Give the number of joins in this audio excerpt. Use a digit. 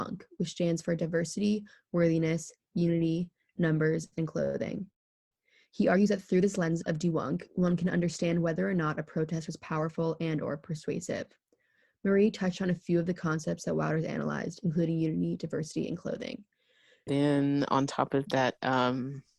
2